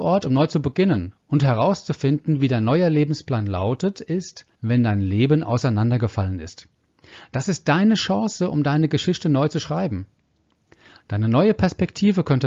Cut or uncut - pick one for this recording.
cut